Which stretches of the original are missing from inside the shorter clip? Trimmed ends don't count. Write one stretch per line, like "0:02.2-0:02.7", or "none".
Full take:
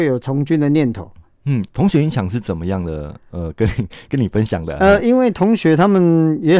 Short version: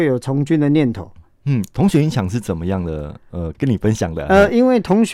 0:03.5-0:04.1